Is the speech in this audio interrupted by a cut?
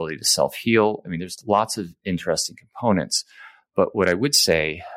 no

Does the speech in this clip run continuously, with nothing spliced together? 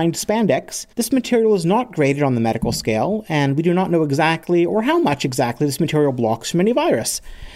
no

